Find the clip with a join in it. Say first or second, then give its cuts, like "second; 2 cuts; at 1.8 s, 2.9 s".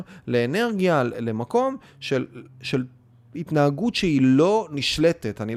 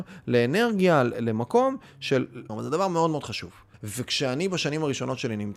second; 2 cuts; at 2.5 s, 3.7 s